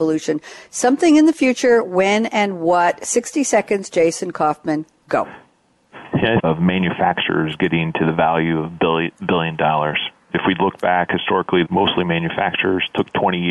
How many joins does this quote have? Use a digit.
2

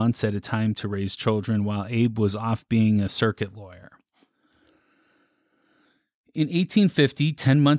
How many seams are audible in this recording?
0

